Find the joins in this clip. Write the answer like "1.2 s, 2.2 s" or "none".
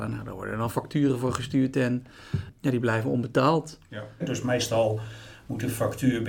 4.2 s